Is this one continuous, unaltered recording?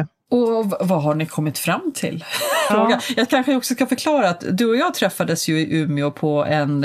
no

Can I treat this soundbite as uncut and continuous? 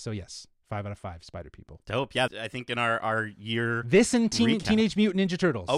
no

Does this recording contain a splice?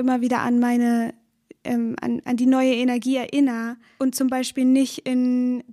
yes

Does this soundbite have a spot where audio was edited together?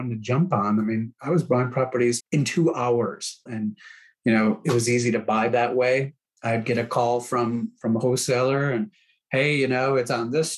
yes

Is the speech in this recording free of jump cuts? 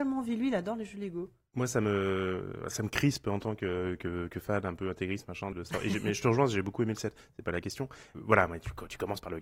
no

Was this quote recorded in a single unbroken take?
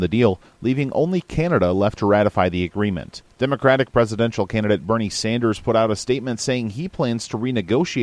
no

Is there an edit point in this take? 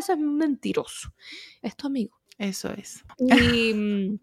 yes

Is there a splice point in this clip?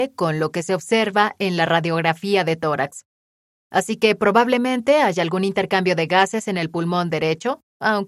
no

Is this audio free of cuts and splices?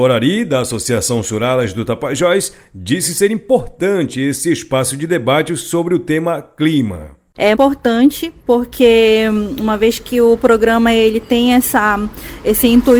no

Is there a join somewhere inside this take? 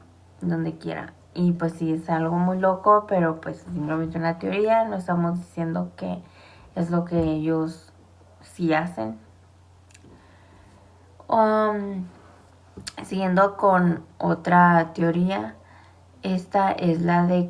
no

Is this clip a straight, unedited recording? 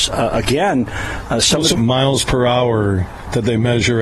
no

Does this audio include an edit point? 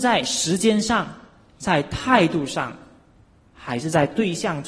yes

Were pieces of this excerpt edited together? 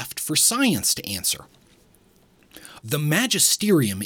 yes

